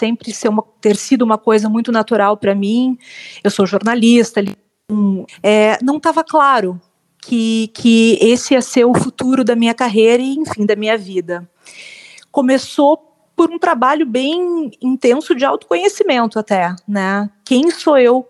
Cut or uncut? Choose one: cut